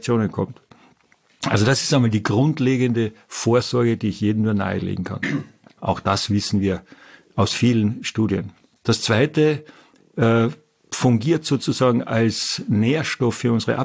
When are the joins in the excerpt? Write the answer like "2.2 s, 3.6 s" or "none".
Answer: 5.8 s, 10.0 s